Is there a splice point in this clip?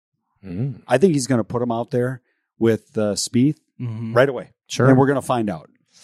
yes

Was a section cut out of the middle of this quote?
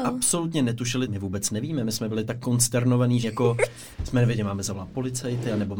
yes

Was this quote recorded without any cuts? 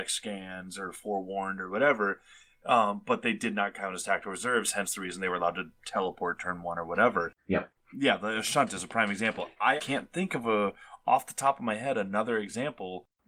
no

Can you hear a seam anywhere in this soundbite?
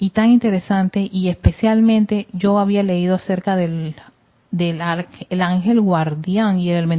no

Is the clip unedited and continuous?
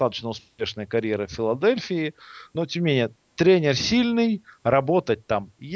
yes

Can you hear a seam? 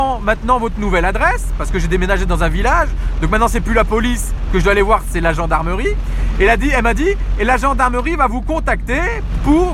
no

